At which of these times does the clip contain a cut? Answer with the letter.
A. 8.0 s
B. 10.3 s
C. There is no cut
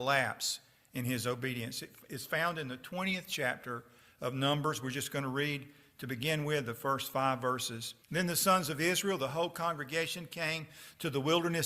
A